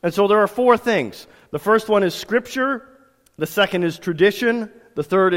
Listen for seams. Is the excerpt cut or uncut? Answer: uncut